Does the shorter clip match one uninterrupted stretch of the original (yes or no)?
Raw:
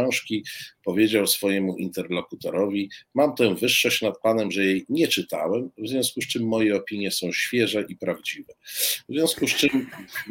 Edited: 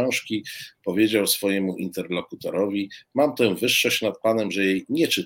yes